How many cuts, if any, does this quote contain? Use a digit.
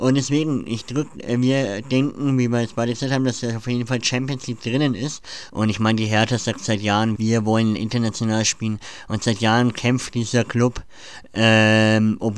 2